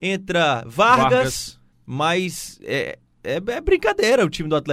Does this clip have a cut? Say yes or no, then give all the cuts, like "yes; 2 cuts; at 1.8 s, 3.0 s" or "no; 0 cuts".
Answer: yes; 1 cut; at 1.7 s